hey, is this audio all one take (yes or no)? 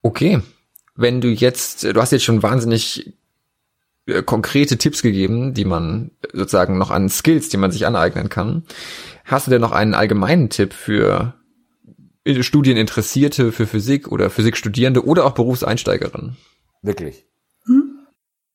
no